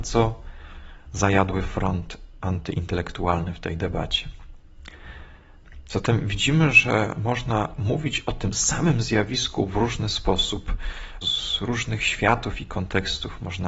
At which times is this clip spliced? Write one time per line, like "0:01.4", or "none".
0:05.9
0:11.2